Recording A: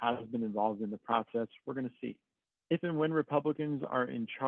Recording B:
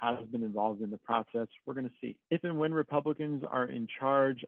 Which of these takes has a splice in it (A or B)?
B